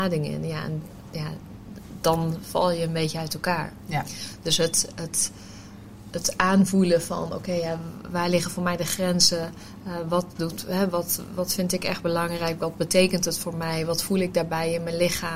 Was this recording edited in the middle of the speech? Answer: no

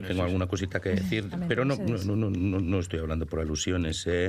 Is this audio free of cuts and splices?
no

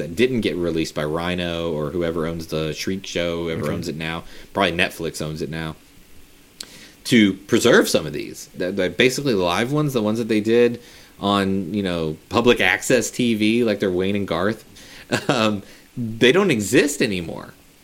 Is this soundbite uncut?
no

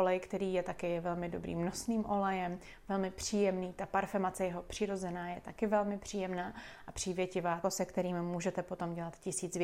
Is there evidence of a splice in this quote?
yes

